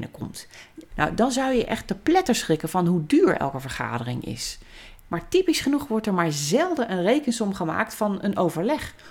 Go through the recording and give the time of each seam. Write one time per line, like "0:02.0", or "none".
0:00.9
0:05.0